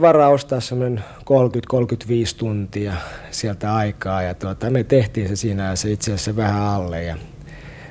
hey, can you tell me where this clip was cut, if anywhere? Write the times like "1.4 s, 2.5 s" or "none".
none